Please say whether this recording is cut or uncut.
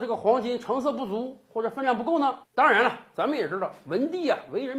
cut